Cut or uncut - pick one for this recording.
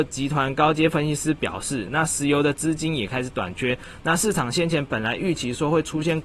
cut